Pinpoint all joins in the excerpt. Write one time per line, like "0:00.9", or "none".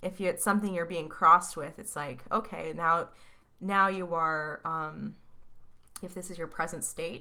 0:06.0